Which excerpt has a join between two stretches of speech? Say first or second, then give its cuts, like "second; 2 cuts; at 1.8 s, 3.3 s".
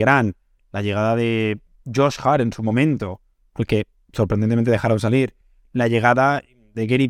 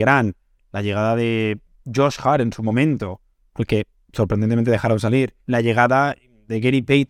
second; 1 cut; at 5.4 s